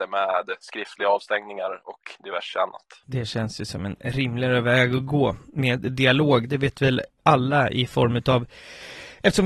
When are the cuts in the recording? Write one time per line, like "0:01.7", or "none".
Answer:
none